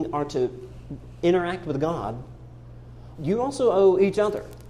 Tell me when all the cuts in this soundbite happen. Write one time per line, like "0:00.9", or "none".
0:03.2